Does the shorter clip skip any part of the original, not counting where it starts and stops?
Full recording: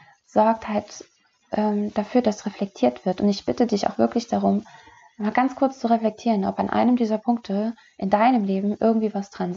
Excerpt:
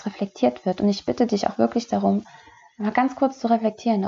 no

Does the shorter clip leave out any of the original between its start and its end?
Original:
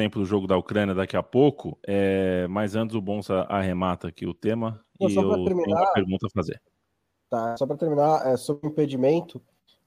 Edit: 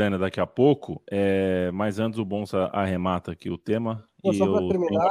no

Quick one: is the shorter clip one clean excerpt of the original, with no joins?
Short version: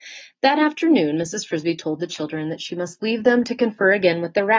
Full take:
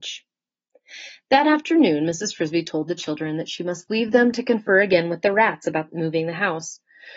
yes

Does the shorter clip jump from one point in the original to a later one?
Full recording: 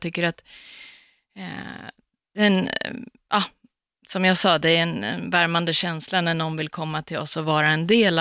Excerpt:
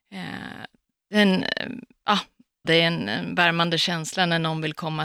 yes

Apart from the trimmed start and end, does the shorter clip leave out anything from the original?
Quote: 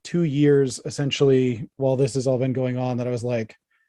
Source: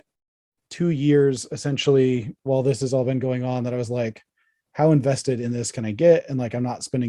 no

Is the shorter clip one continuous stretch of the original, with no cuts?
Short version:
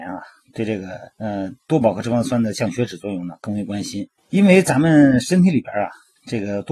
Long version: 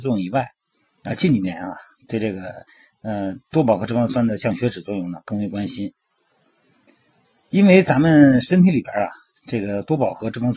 no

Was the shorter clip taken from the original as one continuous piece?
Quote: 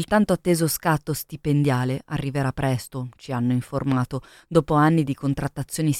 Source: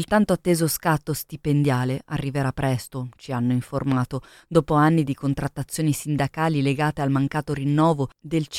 yes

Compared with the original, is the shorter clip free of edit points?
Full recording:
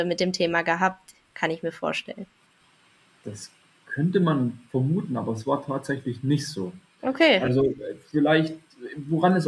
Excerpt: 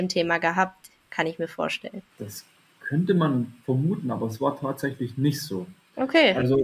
no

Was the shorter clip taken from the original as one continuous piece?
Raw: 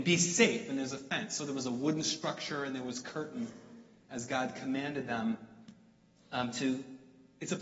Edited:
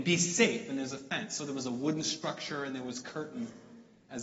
yes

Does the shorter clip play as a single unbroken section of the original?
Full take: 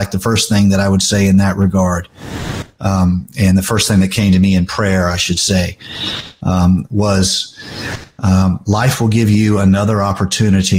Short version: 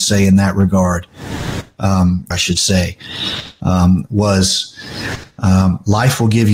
no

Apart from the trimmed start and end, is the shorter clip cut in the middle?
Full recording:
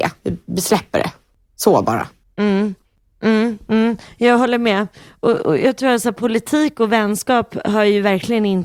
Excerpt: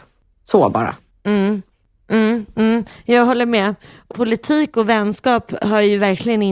yes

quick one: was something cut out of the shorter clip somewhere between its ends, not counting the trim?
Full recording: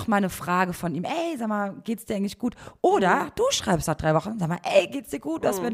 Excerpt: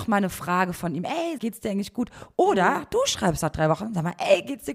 yes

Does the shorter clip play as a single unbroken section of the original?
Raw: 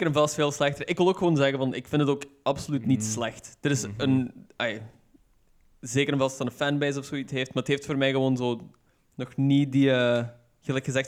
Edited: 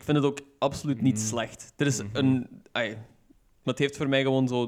no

